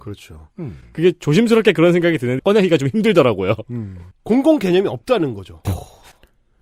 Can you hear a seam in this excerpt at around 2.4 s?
yes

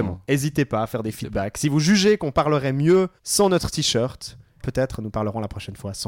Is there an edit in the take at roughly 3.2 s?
yes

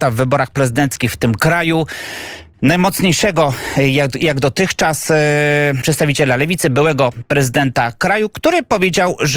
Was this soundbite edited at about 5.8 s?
yes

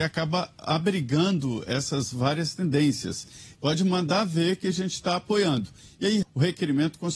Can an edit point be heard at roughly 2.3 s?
no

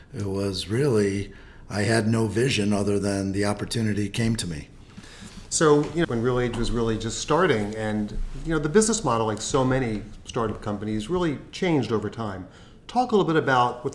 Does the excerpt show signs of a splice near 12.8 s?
no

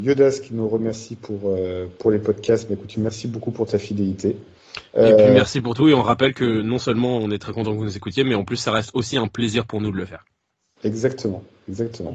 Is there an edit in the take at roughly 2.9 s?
yes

